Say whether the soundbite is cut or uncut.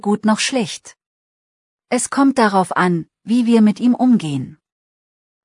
uncut